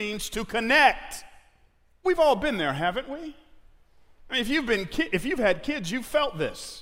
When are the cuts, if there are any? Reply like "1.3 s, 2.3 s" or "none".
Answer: 2.0 s